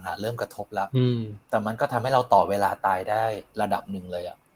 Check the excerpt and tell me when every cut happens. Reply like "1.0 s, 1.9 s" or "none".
1.4 s